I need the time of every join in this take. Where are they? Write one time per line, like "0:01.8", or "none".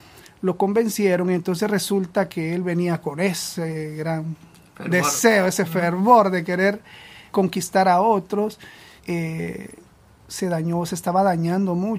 0:07.3
0:09.0